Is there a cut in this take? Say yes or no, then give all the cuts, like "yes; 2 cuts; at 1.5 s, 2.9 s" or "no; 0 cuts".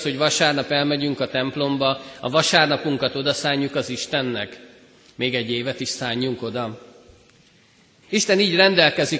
yes; 1 cut; at 8.0 s